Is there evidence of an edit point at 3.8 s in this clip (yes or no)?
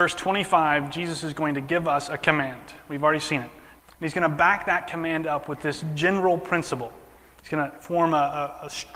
yes